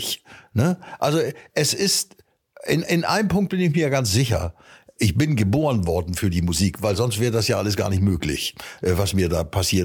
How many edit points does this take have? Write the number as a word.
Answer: zero